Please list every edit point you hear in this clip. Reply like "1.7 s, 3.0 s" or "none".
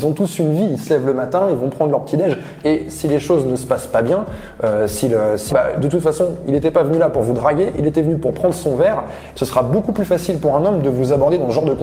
2.6 s, 5.5 s, 9.3 s